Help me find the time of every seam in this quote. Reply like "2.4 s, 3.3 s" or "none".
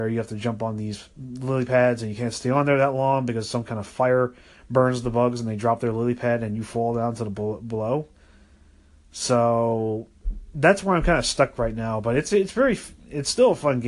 none